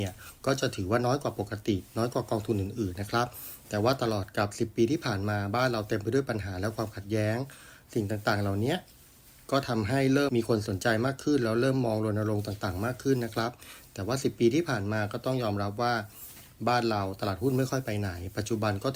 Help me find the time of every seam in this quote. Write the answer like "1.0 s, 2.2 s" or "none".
10.3 s